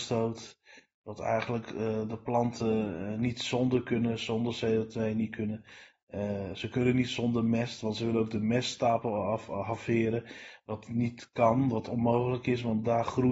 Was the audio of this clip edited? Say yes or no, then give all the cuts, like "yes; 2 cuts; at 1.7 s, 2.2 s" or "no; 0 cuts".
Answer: no; 0 cuts